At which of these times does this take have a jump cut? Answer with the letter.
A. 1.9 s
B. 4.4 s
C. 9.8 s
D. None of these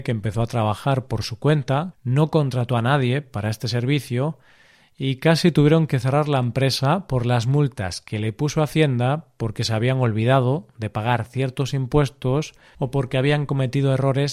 A